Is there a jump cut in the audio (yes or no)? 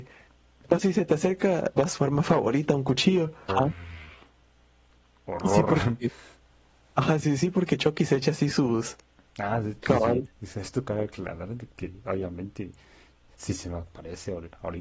yes